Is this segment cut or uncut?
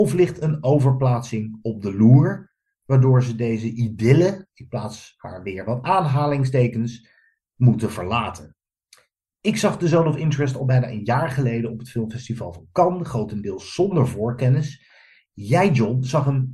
uncut